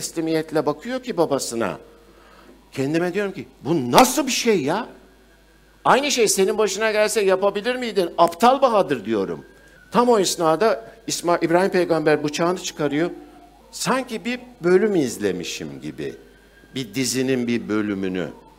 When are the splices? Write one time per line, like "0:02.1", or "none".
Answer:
0:09.8
0:13.6